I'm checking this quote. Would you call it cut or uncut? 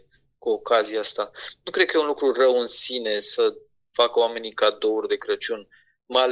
uncut